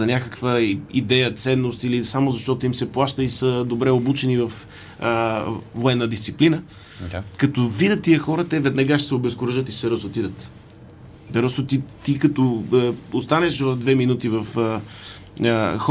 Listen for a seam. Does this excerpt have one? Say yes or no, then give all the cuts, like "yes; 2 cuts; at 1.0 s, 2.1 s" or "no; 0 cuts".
no; 0 cuts